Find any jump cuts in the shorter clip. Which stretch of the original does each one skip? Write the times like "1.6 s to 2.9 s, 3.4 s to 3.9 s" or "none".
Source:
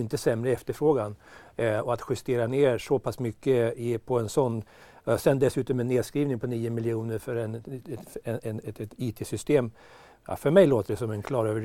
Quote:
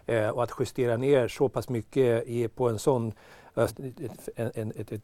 5.2 s to 7.6 s

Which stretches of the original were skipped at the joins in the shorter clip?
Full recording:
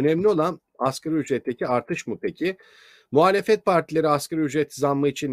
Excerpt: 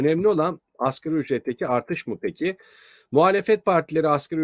none

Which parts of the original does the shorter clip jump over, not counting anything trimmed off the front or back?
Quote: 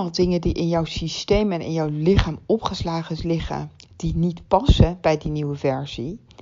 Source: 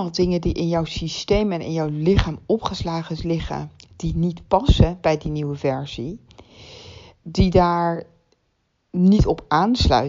none

